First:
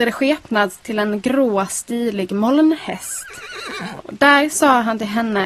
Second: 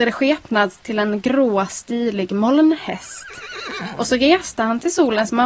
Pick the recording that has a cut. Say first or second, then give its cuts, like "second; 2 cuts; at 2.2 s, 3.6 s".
first; 1 cut; at 4.0 s